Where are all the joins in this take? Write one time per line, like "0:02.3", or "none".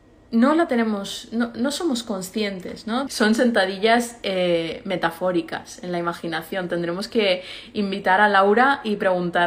0:03.1